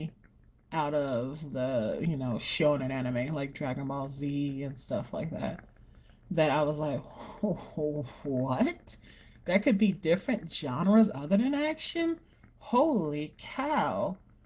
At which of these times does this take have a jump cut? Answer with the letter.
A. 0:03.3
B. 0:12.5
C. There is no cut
C